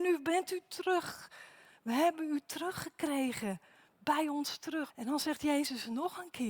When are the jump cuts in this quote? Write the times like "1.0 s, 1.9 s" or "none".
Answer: 4.9 s